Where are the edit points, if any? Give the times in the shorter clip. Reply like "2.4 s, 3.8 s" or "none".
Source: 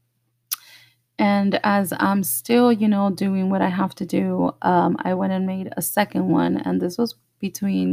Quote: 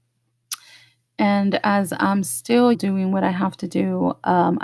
2.7 s

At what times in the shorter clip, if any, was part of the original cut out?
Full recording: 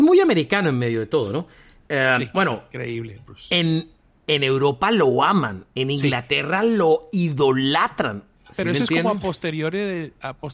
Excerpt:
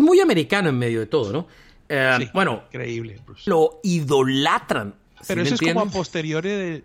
3.5 s

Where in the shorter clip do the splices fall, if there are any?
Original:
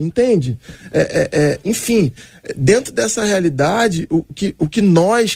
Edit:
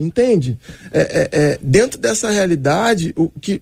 1.6 s

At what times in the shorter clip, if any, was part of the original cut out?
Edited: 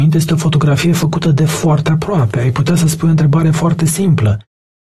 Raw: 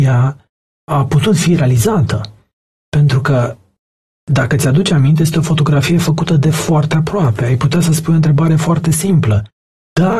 none

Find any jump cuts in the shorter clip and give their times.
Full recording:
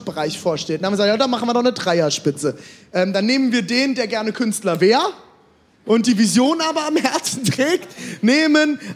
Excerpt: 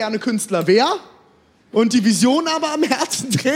none

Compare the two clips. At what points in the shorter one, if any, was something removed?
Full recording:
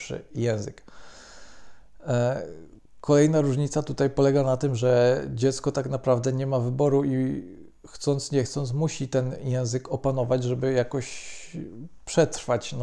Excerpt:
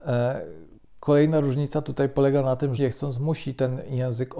2.8 s

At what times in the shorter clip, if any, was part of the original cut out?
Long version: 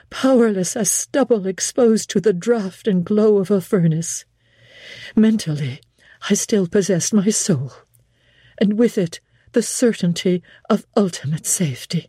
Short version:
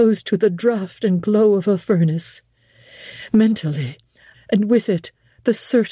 4.3 s

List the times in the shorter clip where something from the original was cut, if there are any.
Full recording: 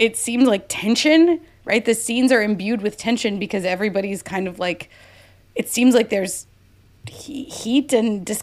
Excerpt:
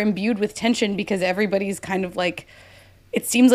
none

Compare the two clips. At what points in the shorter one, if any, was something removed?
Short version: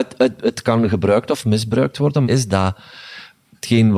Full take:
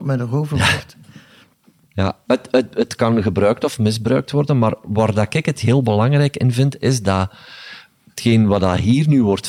2.2 s

